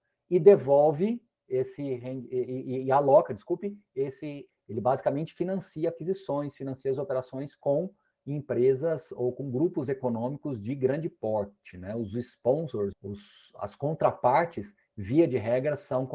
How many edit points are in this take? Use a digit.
3